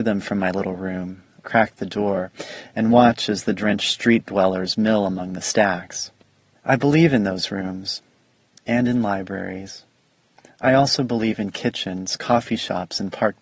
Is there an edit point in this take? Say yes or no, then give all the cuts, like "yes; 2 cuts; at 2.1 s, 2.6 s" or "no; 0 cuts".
yes; 2 cuts; at 1.4 s, 6.5 s